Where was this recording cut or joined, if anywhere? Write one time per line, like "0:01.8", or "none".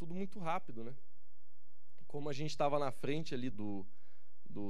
0:03.5